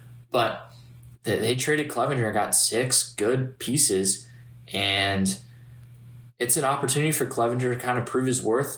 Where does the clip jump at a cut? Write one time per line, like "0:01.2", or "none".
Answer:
none